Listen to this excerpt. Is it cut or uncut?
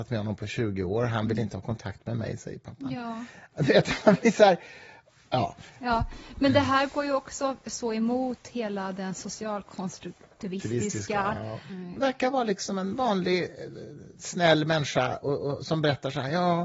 cut